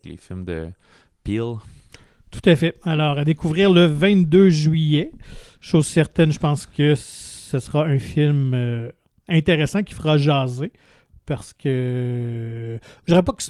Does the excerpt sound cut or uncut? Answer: uncut